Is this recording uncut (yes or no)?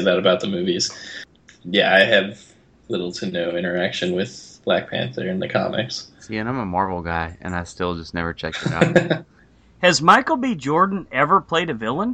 yes